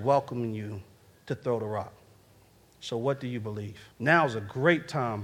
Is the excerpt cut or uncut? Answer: cut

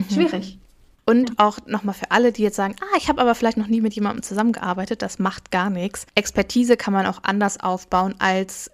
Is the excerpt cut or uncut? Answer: cut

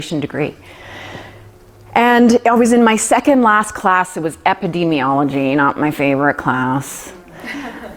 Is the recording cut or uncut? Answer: uncut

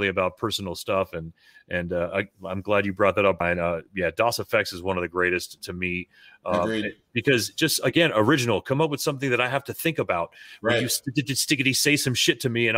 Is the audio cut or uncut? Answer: uncut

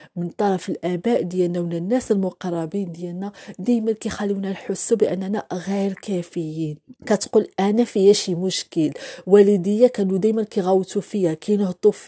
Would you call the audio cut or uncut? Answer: cut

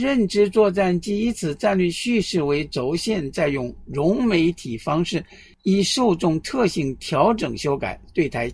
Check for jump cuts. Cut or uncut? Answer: uncut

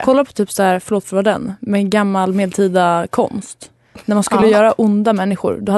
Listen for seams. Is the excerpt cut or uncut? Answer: uncut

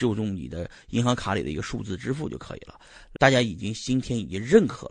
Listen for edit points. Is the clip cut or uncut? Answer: cut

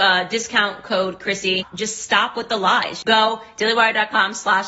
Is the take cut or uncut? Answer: uncut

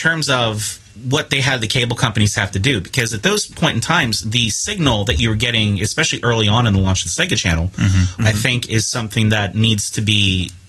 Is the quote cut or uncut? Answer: cut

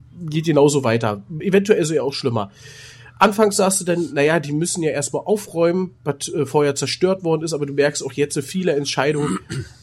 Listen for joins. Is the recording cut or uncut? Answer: uncut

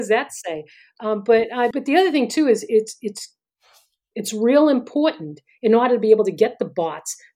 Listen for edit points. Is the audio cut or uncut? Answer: cut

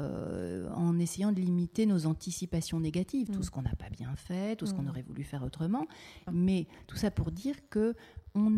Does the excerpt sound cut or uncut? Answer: cut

